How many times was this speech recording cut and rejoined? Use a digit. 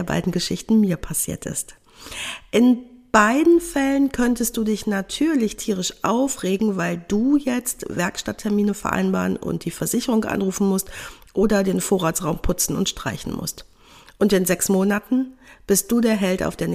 0